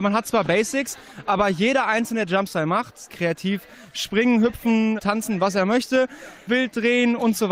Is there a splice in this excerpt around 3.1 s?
yes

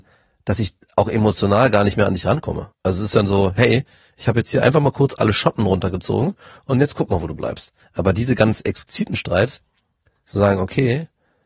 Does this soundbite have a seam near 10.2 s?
yes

